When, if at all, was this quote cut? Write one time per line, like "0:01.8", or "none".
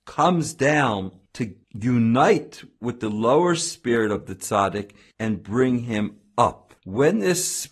0:06.8